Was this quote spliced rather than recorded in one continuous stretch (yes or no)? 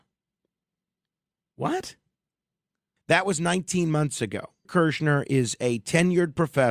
yes